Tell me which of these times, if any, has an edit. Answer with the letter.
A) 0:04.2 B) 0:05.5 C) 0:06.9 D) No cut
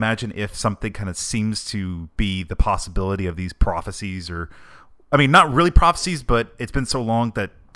D